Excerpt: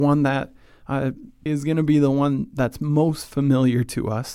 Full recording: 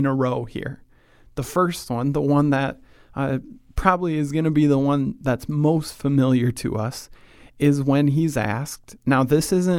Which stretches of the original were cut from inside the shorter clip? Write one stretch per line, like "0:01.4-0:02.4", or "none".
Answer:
0:03.7-0:04.1